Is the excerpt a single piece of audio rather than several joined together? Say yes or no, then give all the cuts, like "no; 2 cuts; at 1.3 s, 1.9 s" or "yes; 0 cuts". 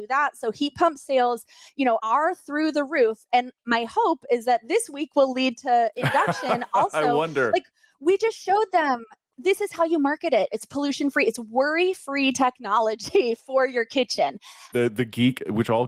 no; 2 cuts; at 10.5 s, 14.7 s